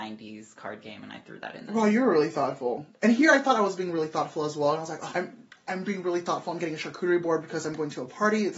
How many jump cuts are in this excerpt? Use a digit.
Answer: 1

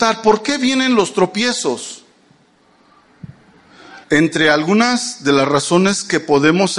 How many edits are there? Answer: 1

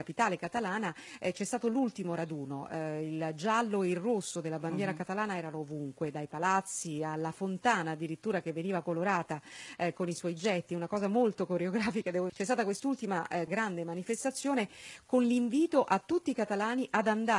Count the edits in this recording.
2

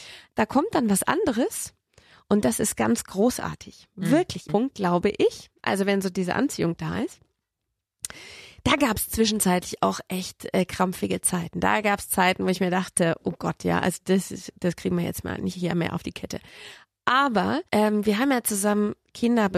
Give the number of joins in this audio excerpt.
2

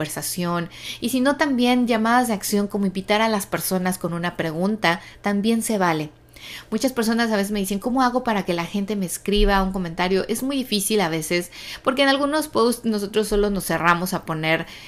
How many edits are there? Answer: 0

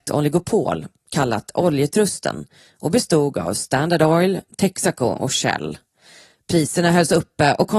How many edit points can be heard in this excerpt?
0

